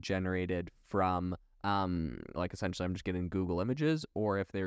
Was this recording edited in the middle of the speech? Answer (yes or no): yes